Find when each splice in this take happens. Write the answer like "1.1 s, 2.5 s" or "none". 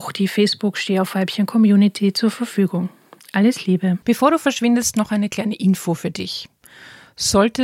4.0 s